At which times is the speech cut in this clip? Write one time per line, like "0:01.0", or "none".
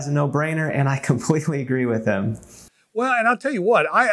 none